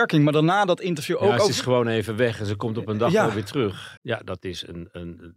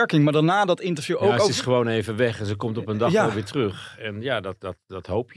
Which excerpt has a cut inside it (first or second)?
first